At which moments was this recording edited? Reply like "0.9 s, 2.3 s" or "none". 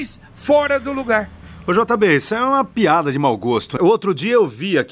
3.8 s